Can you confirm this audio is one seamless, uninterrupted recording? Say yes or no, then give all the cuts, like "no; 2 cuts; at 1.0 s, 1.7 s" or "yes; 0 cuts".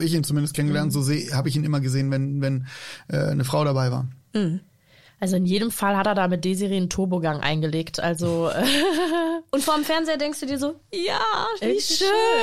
yes; 0 cuts